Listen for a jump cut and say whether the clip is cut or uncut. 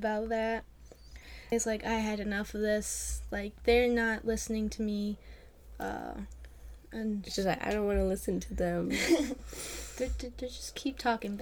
cut